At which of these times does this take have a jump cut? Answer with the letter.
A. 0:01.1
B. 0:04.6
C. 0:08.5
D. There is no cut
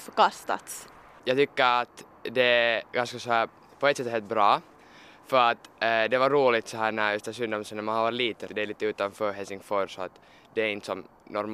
C